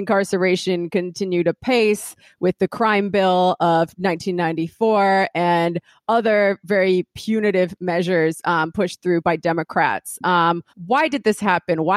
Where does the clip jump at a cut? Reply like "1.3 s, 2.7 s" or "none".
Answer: 10.7 s